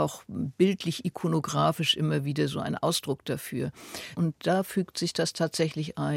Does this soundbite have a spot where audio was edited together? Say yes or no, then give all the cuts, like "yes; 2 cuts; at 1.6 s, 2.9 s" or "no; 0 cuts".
yes; 1 cut; at 4.1 s